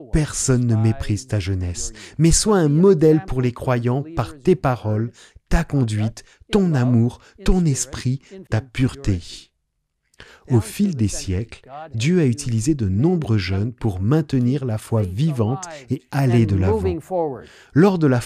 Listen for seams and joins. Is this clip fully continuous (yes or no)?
no